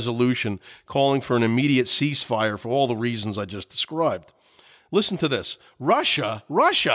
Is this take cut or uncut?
uncut